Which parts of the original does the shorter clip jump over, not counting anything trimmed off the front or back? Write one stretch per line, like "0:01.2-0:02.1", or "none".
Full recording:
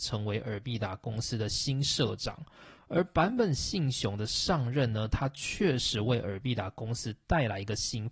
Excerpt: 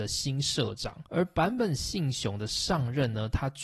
0:02.5-0:02.9